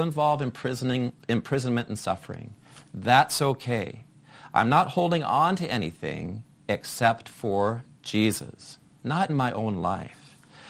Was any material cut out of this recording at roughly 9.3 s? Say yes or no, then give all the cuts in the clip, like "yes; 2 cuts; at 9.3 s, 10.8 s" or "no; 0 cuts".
yes; 1 cut; at 9.3 s